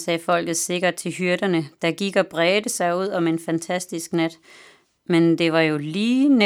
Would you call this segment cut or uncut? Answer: uncut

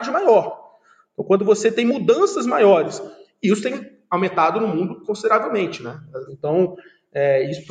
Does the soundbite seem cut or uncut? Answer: cut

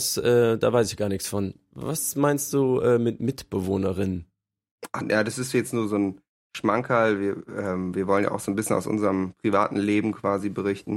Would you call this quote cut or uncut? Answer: cut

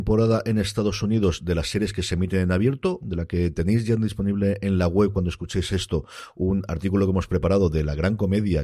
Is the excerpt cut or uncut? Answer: cut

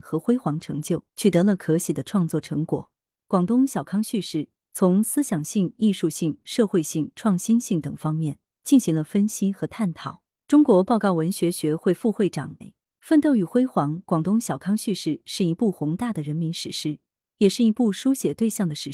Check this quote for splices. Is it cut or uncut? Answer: cut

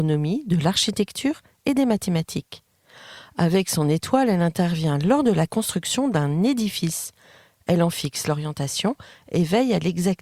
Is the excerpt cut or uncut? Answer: uncut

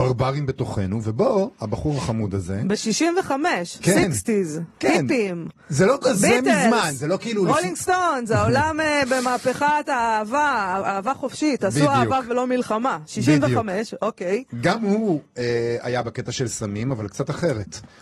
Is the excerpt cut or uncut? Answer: uncut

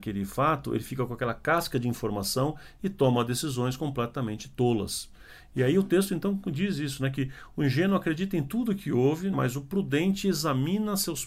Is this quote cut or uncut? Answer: cut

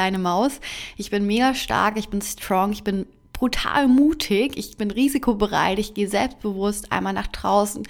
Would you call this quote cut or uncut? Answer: uncut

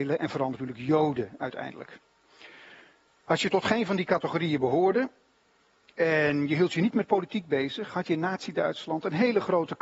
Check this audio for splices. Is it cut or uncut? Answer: uncut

